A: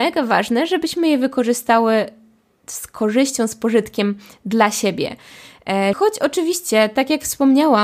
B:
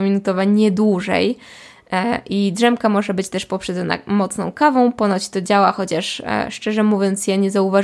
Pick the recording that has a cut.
A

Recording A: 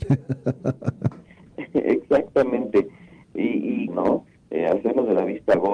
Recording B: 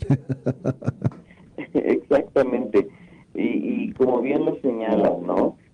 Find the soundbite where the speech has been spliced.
A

